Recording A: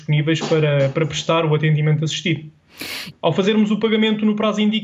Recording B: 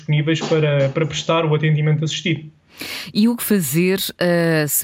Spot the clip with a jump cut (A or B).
A